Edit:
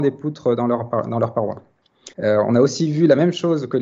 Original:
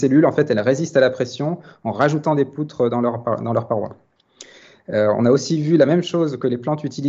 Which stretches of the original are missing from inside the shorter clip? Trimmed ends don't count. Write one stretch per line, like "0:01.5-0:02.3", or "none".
0:04.5-0:04.8